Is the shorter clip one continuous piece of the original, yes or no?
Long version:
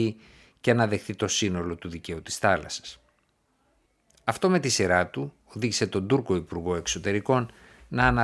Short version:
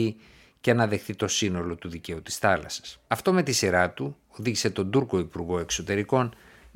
no